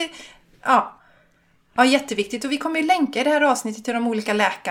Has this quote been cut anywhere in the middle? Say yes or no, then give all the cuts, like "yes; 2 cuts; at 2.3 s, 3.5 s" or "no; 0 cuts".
no; 0 cuts